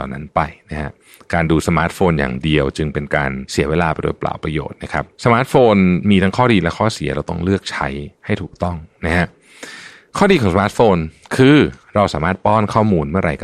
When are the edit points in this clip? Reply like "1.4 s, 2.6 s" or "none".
5.1 s